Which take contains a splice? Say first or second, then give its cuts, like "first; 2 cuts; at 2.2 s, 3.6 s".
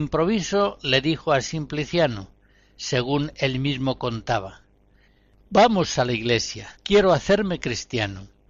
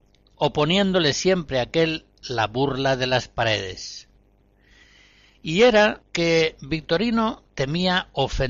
first; 1 cut; at 6.7 s